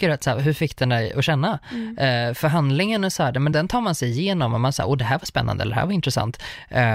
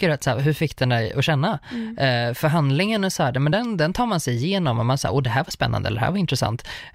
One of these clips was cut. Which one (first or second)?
first